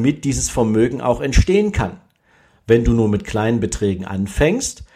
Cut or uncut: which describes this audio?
uncut